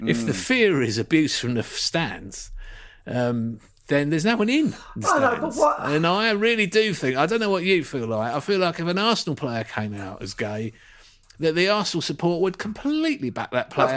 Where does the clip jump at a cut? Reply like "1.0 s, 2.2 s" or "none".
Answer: none